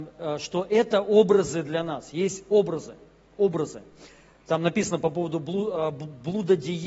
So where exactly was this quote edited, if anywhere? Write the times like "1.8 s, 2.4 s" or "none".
none